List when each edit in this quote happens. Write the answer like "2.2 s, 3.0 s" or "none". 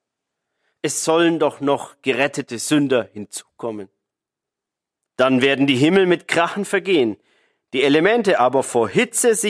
5.1 s